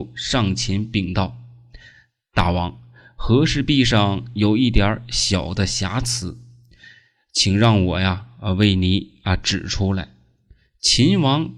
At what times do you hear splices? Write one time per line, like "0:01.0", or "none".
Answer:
none